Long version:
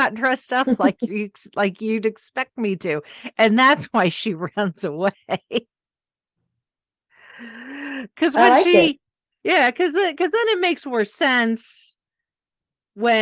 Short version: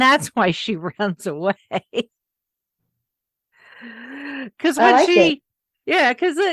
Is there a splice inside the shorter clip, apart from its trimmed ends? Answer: no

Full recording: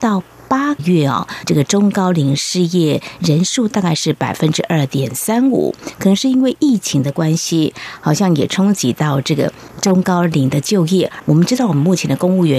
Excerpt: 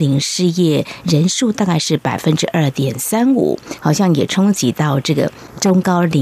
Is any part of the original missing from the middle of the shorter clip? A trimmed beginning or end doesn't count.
yes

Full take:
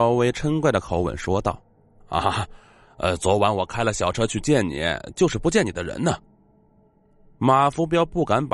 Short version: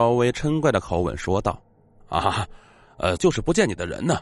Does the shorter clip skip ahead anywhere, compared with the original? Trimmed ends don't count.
yes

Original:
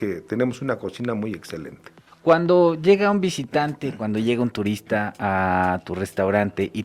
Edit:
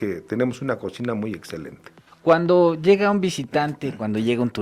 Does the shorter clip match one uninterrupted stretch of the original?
yes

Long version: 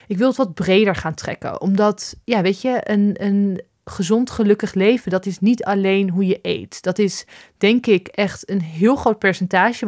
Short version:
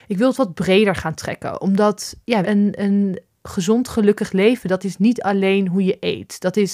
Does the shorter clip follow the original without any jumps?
no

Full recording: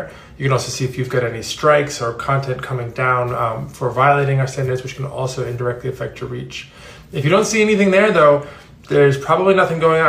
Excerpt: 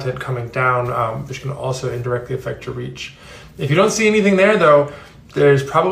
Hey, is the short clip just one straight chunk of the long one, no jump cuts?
no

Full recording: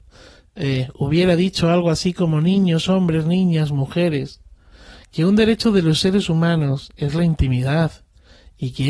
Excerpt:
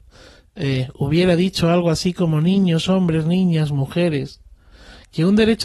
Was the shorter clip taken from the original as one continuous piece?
yes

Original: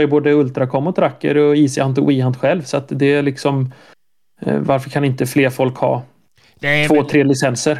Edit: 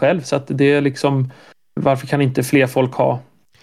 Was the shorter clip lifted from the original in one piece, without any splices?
no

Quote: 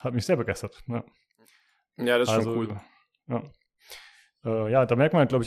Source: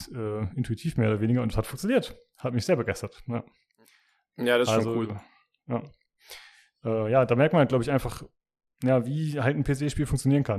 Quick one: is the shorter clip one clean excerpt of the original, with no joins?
yes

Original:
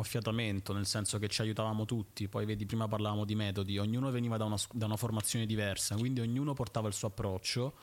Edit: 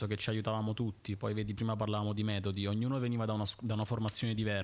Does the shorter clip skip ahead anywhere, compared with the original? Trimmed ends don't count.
no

